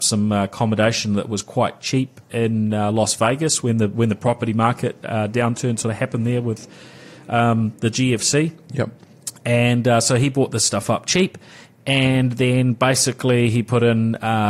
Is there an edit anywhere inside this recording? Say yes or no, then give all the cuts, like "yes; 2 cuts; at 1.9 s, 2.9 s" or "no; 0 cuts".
no; 0 cuts